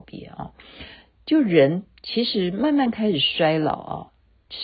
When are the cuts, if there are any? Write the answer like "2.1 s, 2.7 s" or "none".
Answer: none

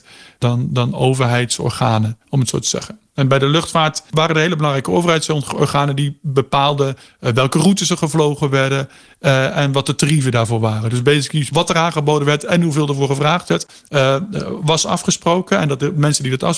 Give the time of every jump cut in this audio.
2.2 s

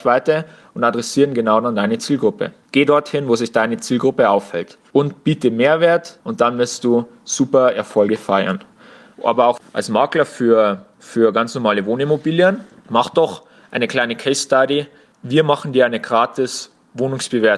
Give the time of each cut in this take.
9.1 s

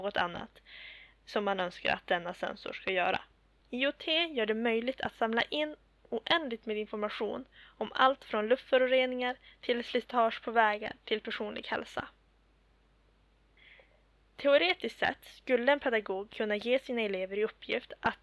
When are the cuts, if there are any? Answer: 3.6 s

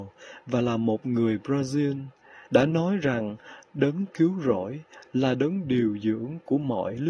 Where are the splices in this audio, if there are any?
2.5 s

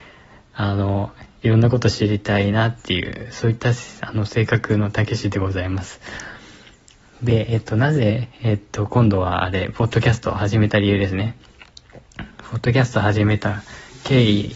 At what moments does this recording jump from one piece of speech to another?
none

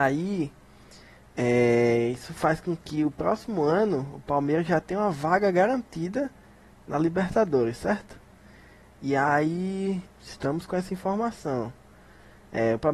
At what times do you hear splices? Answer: 10.1 s

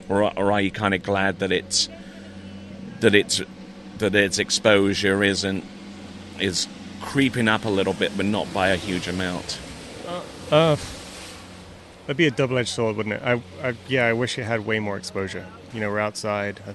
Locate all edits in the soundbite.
15.7 s

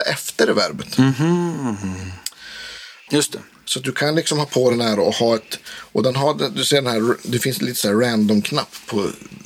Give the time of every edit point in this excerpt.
3.1 s

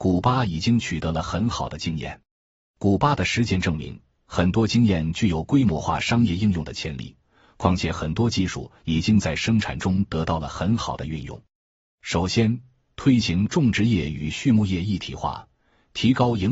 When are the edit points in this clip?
none

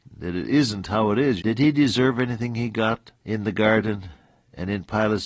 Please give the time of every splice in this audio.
1.4 s, 3.2 s

